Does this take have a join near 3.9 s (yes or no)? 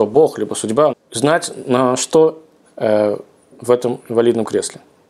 no